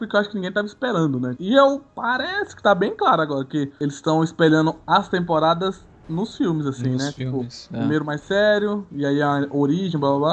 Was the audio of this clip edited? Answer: yes; 1 cut; at 1.4 s

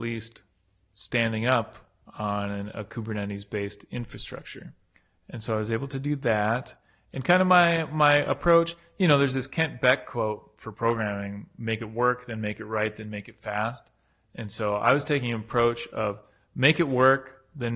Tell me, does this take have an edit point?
no; 0 cuts

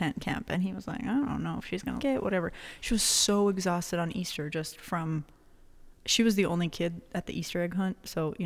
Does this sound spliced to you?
yes; 1 cut; at 2.0 s

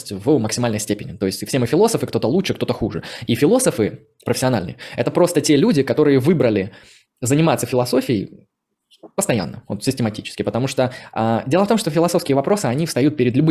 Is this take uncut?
yes; 0 cuts

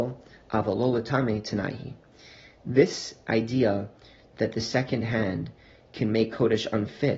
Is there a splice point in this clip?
no; 0 cuts

